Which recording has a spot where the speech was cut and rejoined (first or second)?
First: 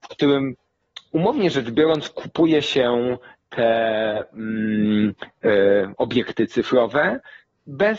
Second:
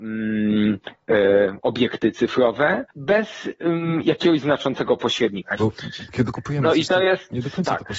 second